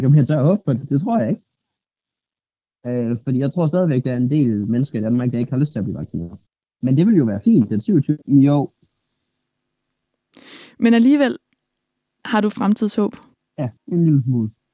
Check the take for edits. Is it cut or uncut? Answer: cut